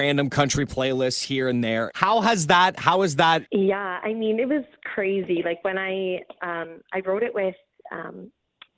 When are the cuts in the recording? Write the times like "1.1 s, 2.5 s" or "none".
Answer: 1.9 s, 3.5 s